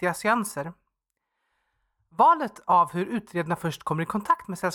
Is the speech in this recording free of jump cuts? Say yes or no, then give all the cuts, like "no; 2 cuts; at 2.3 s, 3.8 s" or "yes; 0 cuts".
yes; 0 cuts